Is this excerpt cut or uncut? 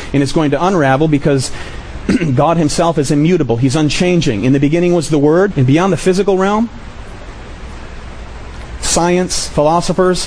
cut